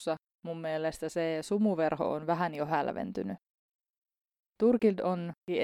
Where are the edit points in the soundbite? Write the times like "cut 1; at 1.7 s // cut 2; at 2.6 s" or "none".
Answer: none